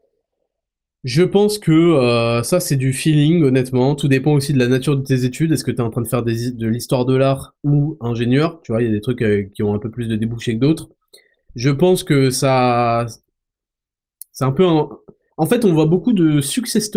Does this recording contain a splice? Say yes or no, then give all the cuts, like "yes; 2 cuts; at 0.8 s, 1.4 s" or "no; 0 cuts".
no; 0 cuts